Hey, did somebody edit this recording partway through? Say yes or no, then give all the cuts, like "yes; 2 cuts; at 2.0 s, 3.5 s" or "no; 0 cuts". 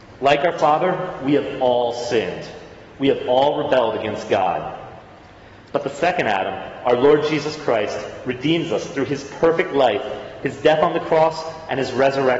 no; 0 cuts